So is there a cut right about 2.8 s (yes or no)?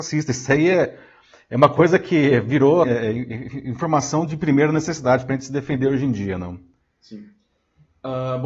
yes